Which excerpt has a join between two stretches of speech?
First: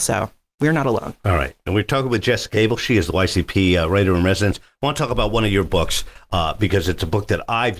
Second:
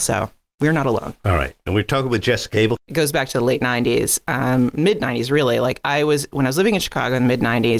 second; 1 cut; at 2.8 s

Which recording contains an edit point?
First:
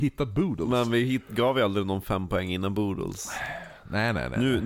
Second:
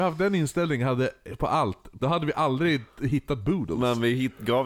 second; 1 cut; at 2.0 s

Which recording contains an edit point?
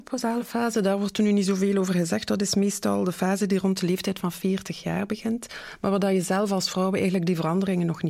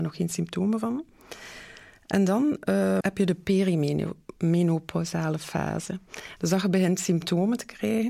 second; 2 cuts; at 3.0 s, 6.4 s

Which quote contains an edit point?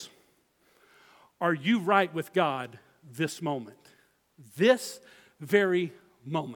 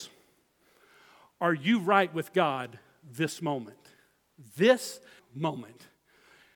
second; 1 cut; at 5.2 s

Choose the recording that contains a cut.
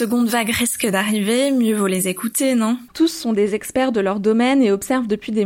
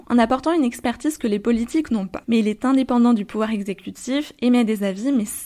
first; 1 cut; at 2.9 s

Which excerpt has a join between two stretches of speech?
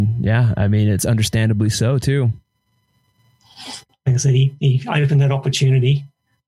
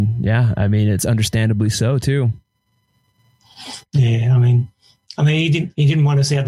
first; 1 cut; at 3.9 s

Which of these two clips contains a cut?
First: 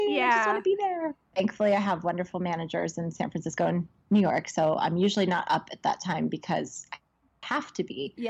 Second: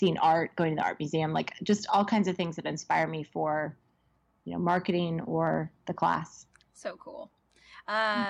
first; 1 cut; at 1.3 s

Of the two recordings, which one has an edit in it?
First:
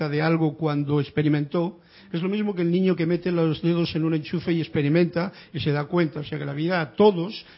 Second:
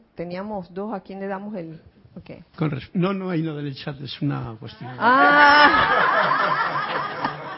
second; 1 cut; at 2.5 s

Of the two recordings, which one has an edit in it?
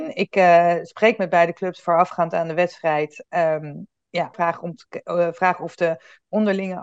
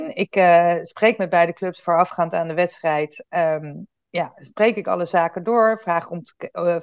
first; 1 cut; at 4.3 s

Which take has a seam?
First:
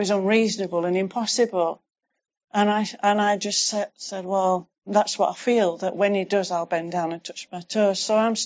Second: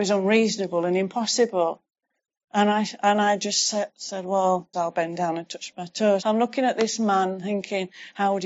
second; 2 cuts; at 4.7 s, 6.2 s

